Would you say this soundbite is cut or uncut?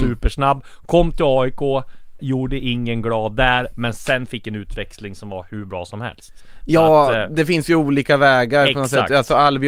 cut